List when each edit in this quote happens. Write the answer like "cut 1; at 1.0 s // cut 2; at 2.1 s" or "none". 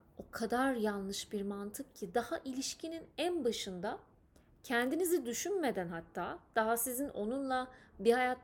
none